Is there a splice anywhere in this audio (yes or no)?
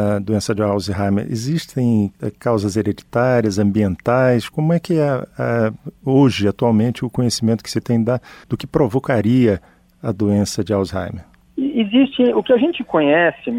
no